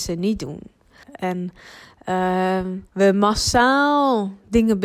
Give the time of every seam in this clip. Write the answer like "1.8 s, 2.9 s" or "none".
1.0 s, 2.9 s